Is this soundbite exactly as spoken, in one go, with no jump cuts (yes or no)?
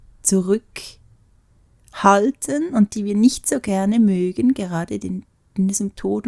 yes